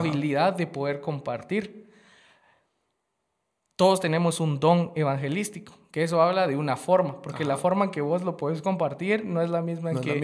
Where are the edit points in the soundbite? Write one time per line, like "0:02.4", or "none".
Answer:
none